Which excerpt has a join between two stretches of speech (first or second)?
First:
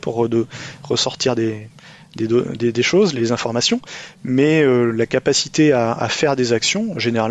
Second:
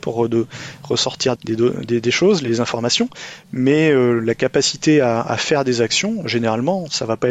second